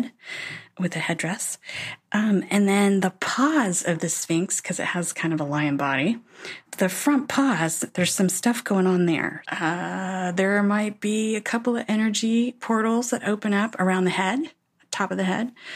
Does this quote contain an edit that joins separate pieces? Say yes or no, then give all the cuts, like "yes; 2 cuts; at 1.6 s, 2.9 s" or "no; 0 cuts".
yes; 2 cuts; at 6.6 s, 9.4 s